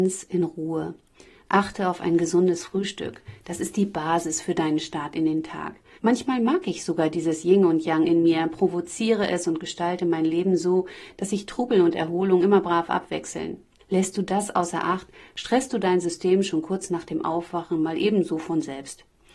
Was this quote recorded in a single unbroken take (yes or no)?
no